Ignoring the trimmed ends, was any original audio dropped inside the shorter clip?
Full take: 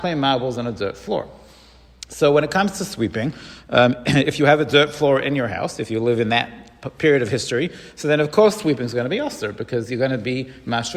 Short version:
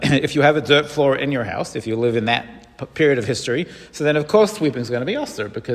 no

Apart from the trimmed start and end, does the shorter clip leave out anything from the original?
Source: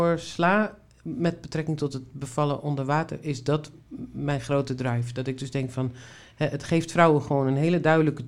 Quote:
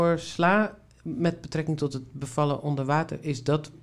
no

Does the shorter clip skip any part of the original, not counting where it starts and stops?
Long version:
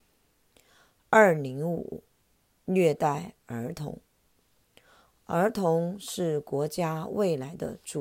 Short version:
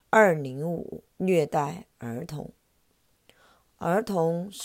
yes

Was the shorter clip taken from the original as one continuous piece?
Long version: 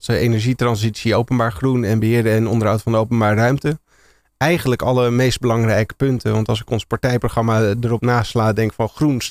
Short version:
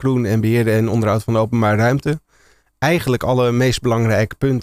yes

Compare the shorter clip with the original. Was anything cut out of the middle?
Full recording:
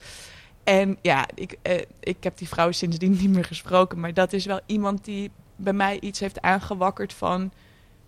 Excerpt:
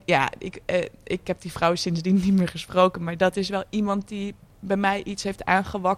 no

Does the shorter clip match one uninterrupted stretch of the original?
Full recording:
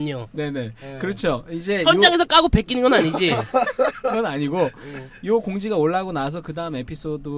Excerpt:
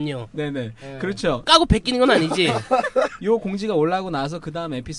no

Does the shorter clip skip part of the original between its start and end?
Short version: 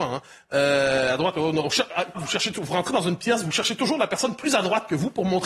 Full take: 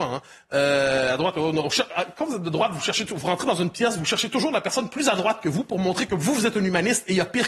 yes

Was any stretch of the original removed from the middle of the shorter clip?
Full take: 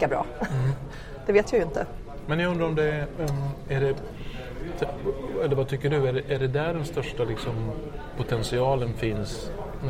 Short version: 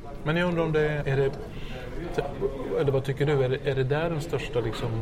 yes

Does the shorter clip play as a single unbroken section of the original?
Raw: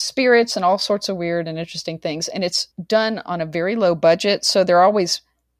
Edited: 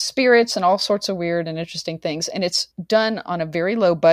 yes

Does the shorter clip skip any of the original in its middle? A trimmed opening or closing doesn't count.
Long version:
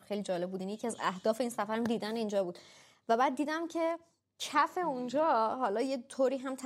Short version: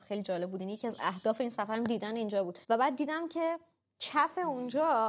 yes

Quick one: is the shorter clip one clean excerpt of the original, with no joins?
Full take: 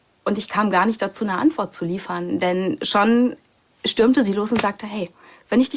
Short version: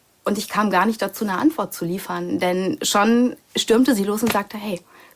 no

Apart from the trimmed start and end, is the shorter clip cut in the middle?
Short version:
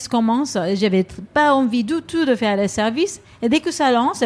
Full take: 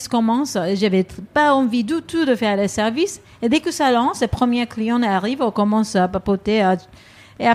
no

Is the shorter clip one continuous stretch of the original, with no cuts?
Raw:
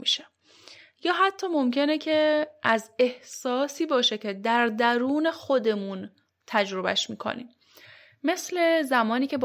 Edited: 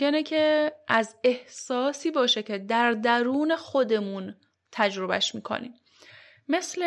yes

